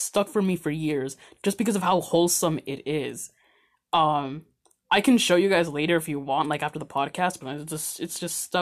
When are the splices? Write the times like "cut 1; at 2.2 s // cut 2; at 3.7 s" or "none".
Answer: cut 1; at 7.4 s